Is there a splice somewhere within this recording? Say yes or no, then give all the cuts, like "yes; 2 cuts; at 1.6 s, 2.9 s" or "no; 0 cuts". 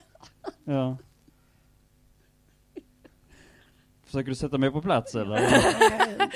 no; 0 cuts